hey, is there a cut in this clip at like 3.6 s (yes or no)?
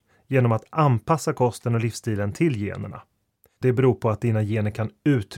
yes